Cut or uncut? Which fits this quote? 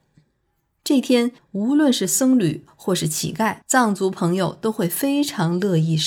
cut